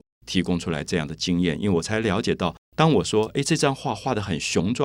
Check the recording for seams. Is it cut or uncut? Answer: uncut